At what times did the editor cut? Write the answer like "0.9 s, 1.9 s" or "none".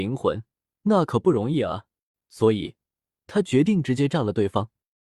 2.1 s